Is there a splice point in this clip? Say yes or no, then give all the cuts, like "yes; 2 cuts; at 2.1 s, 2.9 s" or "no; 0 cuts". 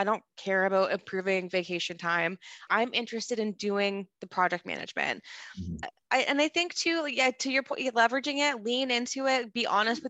yes; 2 cuts; at 2.7 s, 5.8 s